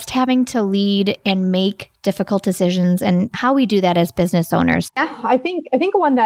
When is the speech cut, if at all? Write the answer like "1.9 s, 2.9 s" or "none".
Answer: 4.9 s